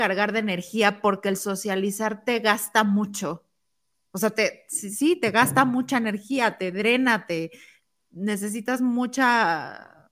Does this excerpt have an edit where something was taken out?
no; 0 cuts

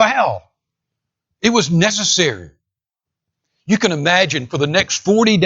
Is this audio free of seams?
yes; 0 cuts

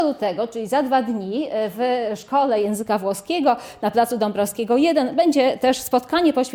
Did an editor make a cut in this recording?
no; 0 cuts

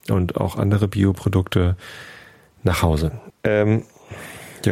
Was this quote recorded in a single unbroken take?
no; 1 cut; at 3.3 s

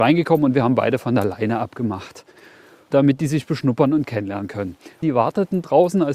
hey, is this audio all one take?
no; 1 cut; at 5.0 s

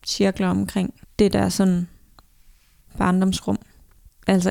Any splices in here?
yes; 1 cut; at 1.0 s

